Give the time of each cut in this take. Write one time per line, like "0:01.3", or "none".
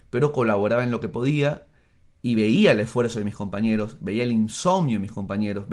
none